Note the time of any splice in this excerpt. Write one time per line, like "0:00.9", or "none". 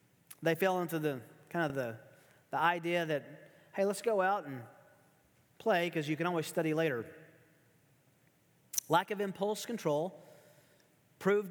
none